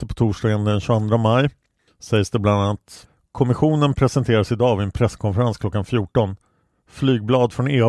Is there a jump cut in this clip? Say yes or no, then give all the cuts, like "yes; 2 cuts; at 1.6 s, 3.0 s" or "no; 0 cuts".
no; 0 cuts